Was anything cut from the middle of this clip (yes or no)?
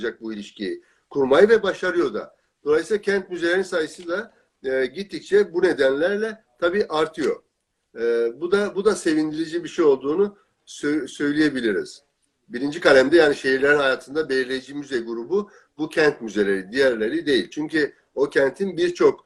yes